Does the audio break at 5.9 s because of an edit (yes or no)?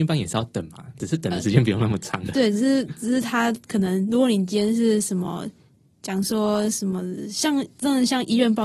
no